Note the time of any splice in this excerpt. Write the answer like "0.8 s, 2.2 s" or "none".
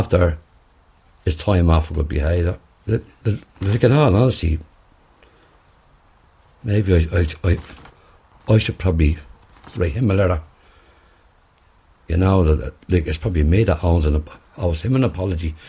2.8 s